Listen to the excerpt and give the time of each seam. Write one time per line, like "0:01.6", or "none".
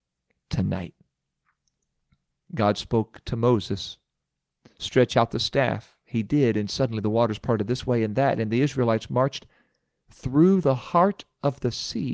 0:02.4